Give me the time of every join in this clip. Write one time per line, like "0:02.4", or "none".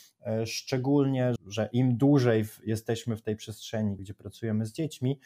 0:01.4
0:04.0